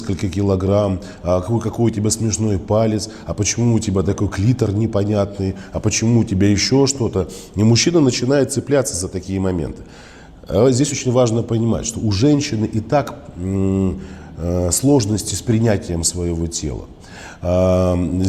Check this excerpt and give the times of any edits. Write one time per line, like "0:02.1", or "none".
none